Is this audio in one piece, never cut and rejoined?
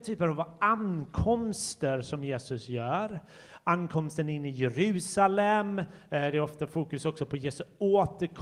yes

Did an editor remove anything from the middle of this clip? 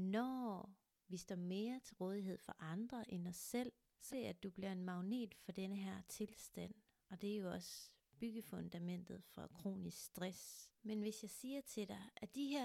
yes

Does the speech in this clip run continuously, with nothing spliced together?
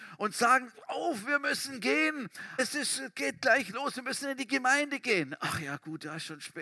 no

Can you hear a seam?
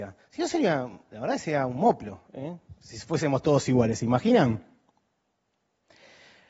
no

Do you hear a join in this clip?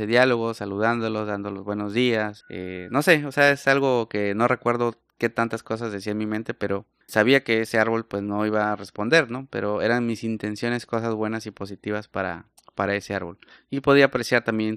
yes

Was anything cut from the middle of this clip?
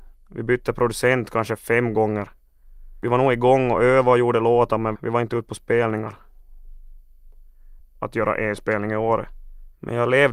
yes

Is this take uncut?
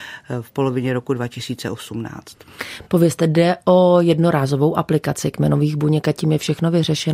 yes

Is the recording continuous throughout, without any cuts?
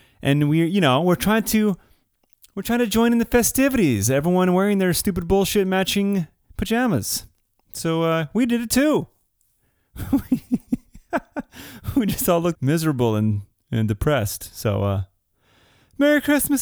no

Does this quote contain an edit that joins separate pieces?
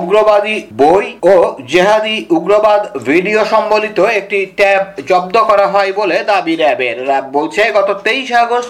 yes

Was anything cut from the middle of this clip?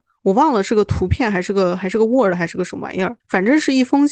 yes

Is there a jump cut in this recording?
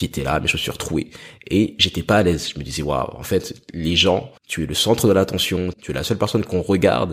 yes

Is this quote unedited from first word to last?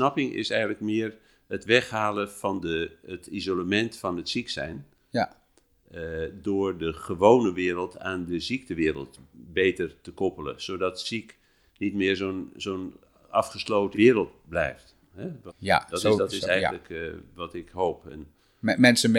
no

